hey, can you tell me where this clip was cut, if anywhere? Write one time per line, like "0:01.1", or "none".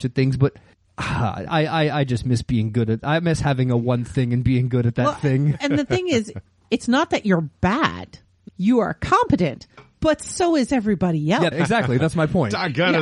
0:08.5
0:11.5